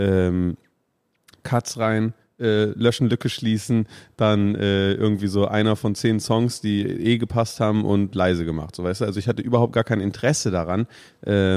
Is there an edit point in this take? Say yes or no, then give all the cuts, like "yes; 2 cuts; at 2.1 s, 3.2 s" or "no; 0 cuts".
no; 0 cuts